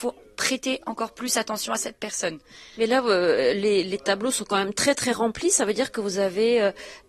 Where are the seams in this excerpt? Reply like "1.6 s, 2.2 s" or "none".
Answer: none

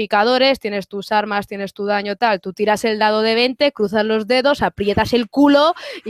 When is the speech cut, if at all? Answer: none

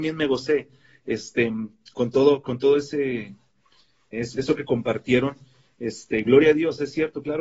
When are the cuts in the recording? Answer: 4.1 s

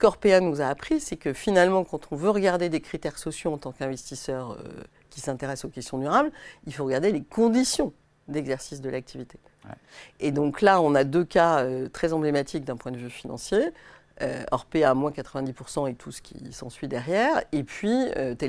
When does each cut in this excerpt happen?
none

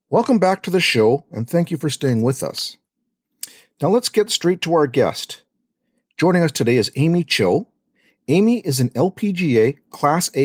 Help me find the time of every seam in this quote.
none

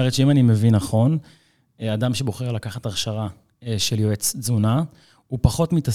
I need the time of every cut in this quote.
none

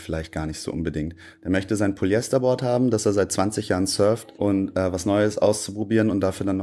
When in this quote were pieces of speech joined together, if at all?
4.3 s

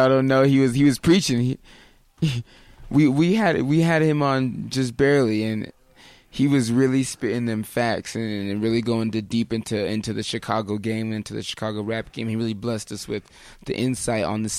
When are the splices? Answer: none

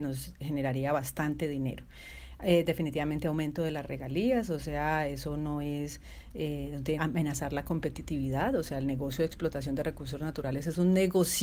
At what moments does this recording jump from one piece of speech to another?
7.0 s

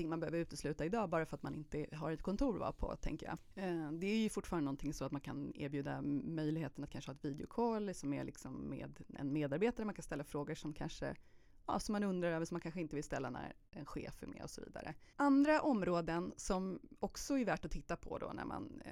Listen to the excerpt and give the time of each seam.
15.1 s

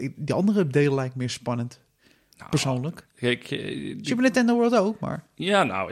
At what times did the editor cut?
none

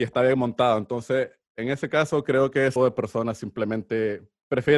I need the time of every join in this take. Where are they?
2.8 s

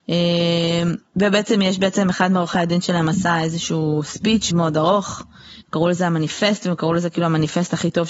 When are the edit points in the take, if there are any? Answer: 1.1 s, 4.5 s, 5.6 s

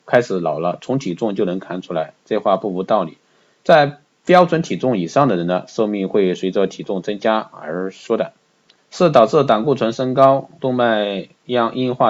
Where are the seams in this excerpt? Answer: 8.8 s, 10.6 s

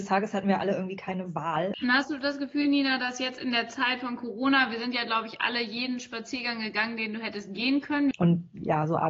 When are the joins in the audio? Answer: 1.7 s, 8.1 s

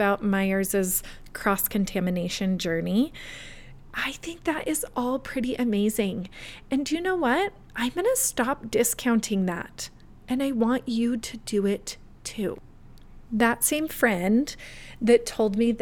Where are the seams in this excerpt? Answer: 3.8 s, 13.3 s

